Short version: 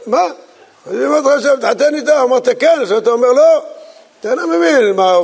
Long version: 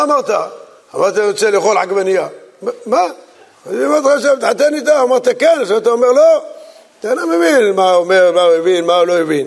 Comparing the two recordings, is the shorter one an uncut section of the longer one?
yes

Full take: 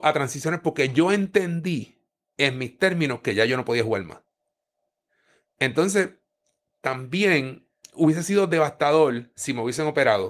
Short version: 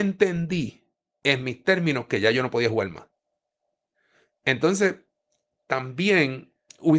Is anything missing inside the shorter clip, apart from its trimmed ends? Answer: no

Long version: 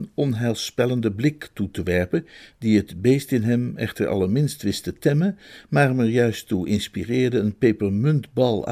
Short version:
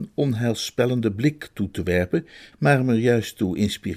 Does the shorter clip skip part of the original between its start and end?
yes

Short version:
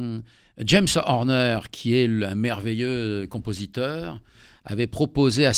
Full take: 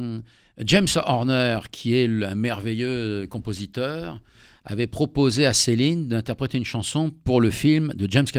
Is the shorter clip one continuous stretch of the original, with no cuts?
yes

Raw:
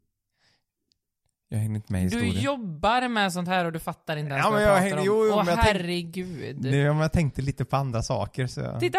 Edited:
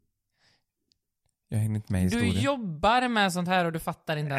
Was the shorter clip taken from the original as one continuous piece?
yes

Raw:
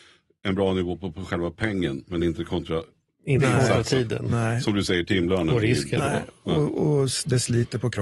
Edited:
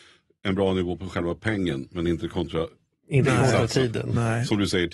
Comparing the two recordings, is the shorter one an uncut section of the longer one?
no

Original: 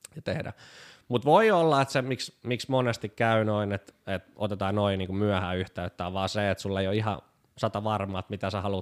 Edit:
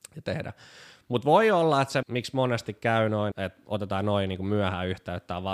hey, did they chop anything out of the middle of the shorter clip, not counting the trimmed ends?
yes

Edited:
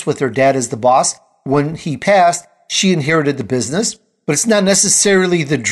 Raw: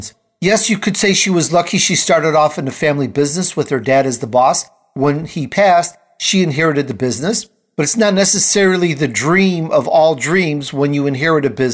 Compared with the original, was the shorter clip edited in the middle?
no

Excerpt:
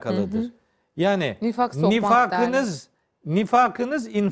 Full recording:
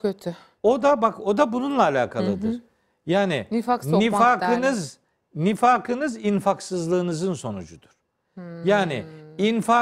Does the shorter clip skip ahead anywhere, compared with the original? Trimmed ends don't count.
no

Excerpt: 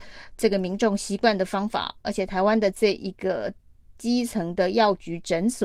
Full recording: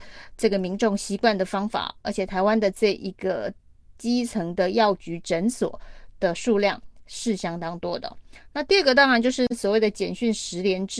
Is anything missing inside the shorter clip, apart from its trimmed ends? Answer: no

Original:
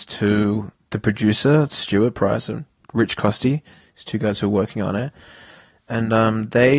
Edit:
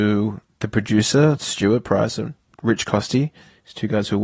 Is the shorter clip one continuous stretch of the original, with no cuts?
yes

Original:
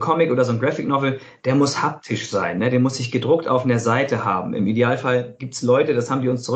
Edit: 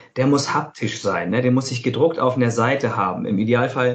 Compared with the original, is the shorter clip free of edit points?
yes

